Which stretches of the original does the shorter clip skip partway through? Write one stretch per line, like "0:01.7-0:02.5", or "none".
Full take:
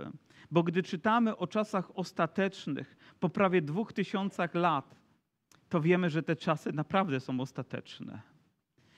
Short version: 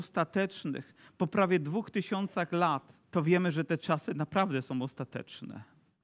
0:05.1-0:05.6